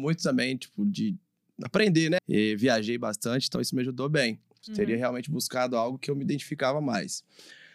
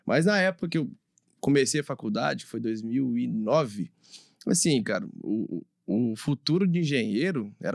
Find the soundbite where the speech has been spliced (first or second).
first